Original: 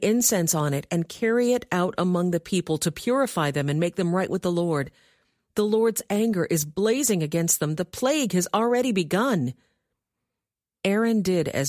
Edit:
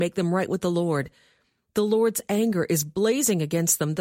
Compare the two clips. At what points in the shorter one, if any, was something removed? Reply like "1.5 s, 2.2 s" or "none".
none

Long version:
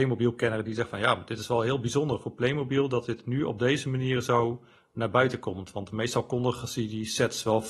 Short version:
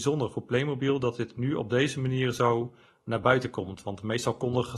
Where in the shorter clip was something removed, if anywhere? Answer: none

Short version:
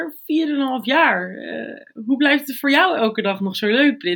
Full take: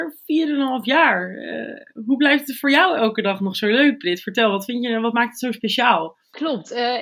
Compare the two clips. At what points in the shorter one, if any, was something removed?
none

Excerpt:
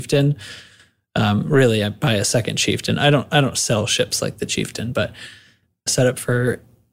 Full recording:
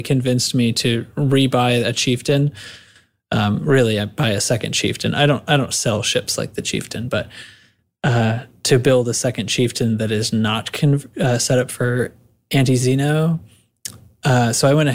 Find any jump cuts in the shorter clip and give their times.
5.9 s

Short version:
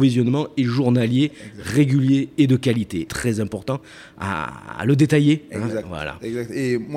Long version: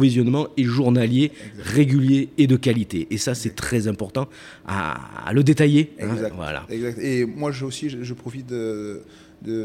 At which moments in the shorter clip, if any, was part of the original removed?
3.1 s

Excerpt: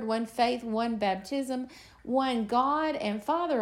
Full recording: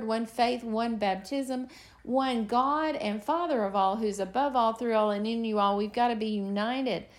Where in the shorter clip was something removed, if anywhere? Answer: none

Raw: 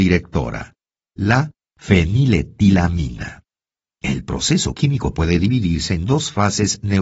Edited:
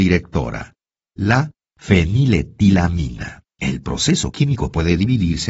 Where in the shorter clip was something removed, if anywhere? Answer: 3.5 s

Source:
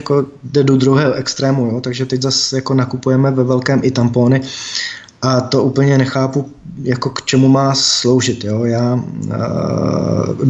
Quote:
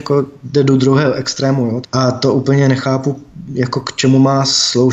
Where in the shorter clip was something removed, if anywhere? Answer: 1.8 s

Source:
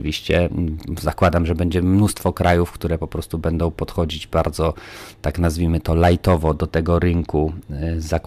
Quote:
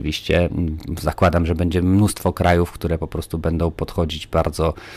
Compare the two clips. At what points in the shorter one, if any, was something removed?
none

